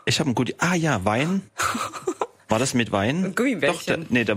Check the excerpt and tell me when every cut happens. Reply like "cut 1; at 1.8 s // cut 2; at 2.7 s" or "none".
none